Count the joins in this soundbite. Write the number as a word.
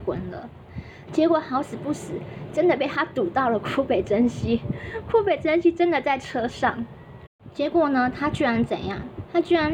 one